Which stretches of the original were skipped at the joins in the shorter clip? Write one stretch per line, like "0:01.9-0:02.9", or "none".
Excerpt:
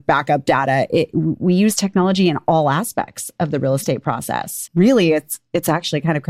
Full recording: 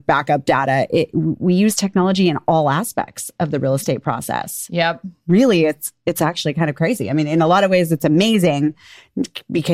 0:04.7-0:05.2